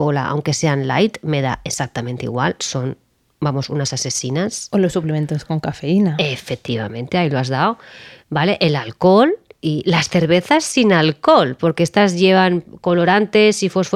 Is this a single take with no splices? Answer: yes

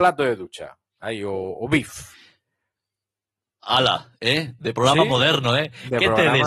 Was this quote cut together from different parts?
yes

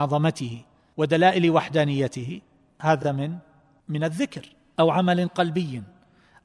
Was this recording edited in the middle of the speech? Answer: no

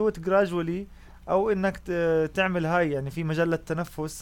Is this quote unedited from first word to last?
yes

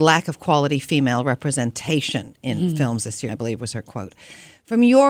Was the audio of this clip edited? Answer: yes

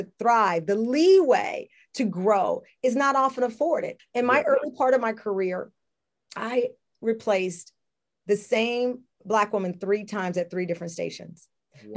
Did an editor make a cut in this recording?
yes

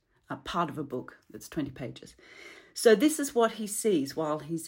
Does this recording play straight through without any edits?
yes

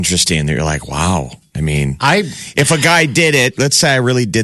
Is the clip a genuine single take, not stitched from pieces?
yes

